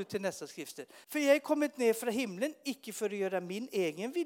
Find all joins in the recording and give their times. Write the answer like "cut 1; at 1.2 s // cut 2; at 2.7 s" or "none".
cut 1; at 1.0 s